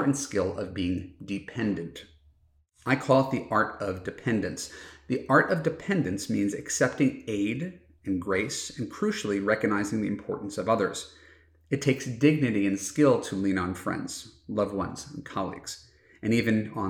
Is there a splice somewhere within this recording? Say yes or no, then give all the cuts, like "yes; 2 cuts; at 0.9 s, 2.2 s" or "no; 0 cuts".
no; 0 cuts